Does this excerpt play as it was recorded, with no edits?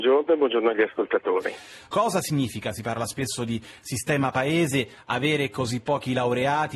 no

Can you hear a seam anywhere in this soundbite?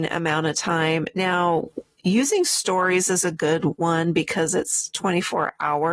no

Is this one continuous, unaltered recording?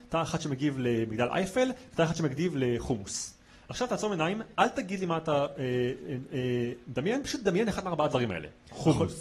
yes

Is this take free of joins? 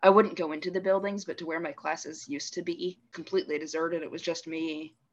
no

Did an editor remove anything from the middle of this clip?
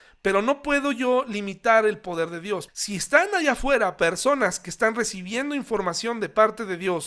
yes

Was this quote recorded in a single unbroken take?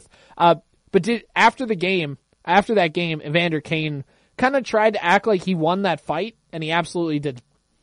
yes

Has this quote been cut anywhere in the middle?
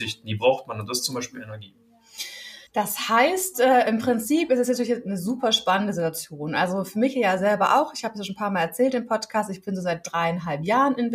yes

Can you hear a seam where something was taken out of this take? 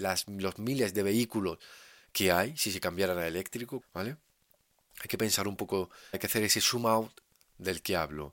yes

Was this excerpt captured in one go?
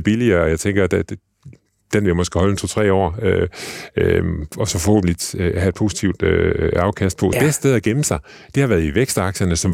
no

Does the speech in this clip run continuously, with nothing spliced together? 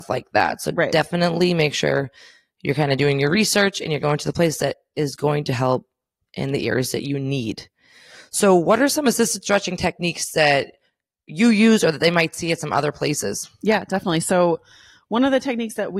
yes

